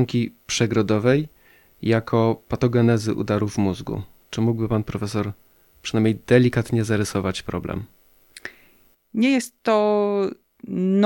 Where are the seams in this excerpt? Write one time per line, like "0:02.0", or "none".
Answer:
none

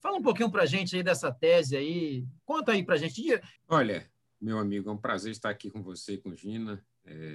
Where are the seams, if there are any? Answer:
0:03.6

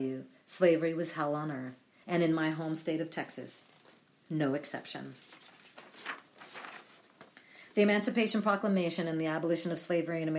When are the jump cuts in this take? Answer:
none

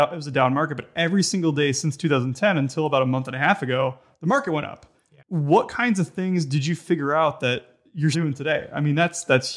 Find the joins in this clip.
0:05.2
0:08.1

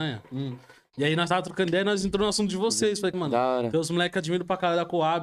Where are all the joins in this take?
0:03.1

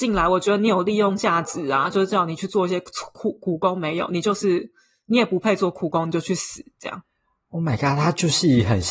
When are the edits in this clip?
none

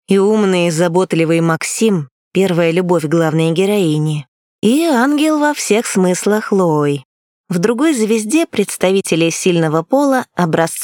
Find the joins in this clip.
0:07.3

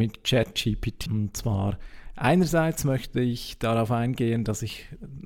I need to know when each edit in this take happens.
0:01.1

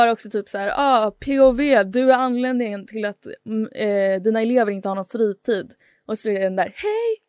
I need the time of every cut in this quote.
none

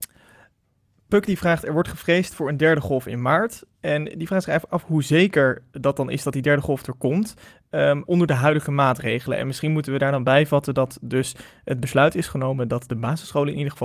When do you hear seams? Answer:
0:08.1

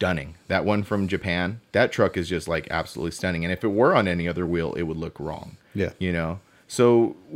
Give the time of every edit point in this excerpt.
0:01.7

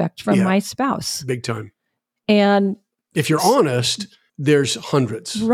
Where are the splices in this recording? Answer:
0:04.3

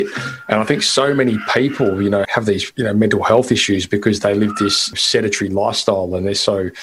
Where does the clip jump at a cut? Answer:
none

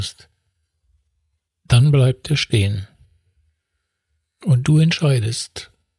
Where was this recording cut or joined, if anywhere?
none

